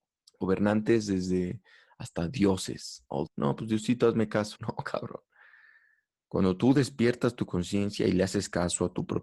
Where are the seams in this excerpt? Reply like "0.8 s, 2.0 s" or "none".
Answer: 3.3 s, 4.6 s